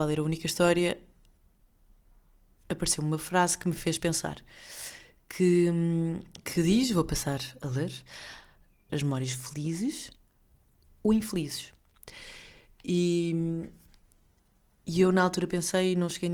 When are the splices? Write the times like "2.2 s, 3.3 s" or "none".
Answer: 8.9 s